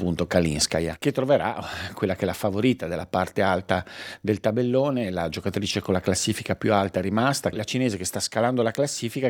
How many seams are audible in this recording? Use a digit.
1